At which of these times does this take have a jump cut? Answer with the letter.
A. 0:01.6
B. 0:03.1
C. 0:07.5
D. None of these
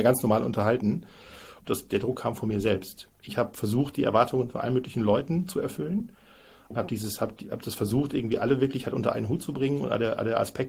A